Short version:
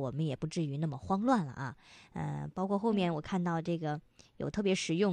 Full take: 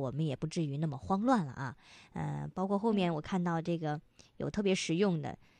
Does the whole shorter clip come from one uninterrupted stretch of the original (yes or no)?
yes